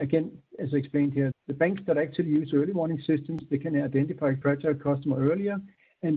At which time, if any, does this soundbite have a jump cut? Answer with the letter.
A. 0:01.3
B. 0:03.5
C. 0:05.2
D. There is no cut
A